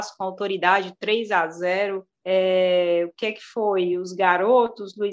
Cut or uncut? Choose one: cut